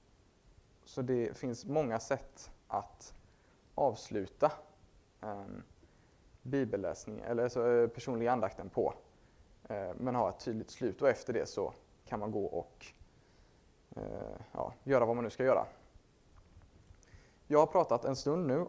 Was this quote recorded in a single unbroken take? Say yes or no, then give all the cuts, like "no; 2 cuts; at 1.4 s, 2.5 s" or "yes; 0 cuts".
yes; 0 cuts